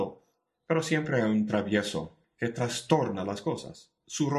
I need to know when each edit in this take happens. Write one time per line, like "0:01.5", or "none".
0:02.2